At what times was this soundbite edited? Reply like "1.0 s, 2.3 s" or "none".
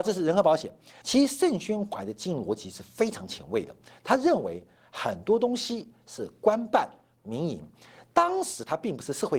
1.0 s